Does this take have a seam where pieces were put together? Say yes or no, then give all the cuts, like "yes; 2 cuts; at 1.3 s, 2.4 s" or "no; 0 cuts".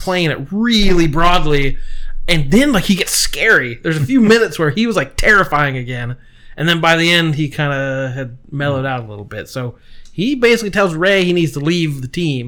no; 0 cuts